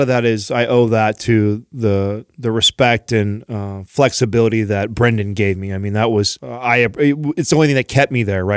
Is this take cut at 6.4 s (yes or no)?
yes